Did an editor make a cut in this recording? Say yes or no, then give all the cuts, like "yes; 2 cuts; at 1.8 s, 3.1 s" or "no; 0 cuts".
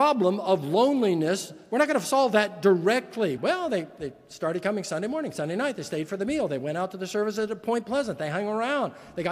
yes; 1 cut; at 3.4 s